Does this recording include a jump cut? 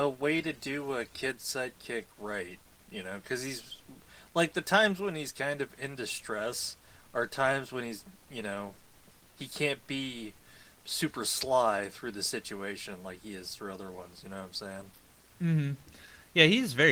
no; 0 cuts

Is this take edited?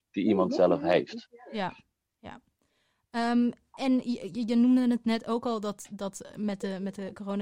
no; 0 cuts

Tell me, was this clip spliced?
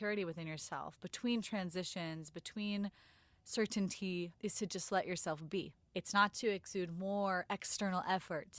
yes; 2 cuts; at 4.3 s, 5.9 s

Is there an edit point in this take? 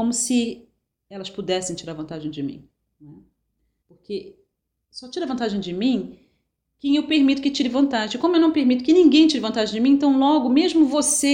yes; 1 cut; at 3.8 s

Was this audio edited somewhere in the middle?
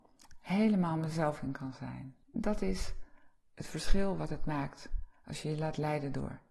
yes; 1 cut; at 2.2 s

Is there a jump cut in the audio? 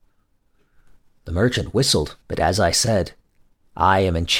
yes; 1 cut; at 2.2 s

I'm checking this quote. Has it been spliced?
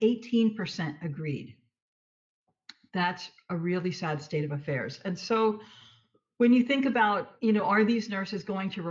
no; 0 cuts

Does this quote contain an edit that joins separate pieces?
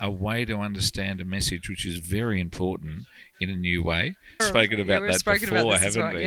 yes; 1 cut; at 4.4 s

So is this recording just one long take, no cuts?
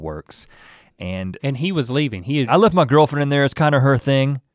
no; 2 cuts; at 1.4 s, 2.5 s

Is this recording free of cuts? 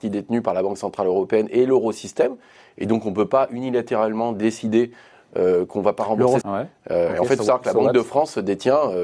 no; 1 cut; at 6.4 s

